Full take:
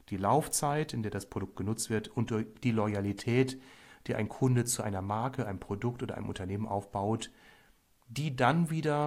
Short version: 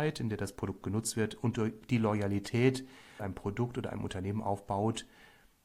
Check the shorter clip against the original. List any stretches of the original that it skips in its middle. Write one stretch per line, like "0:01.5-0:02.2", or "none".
0:03.9-0:05.4